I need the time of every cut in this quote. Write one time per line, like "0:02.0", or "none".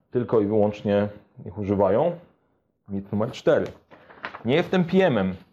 none